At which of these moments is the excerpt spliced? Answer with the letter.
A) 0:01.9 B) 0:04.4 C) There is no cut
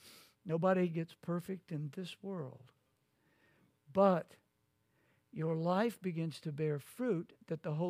C